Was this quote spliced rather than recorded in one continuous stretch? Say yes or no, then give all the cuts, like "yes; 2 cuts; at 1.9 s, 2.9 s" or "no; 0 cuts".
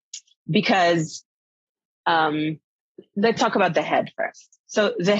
no; 0 cuts